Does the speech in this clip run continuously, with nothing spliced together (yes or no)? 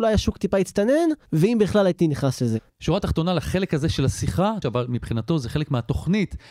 no